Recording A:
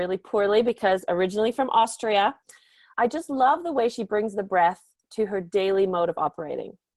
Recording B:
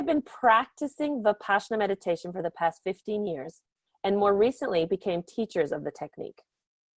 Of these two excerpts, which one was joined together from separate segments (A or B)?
A